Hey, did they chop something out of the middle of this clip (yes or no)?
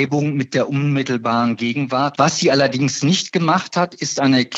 yes